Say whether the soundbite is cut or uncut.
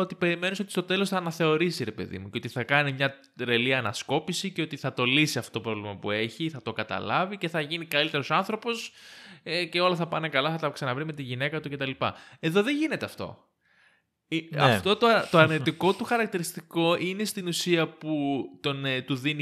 uncut